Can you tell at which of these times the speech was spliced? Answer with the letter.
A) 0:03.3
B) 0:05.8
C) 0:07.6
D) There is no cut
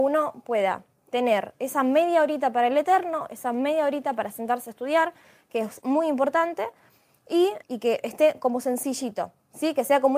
C